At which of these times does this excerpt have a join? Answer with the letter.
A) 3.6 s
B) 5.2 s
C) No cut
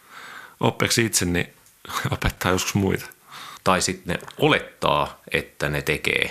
A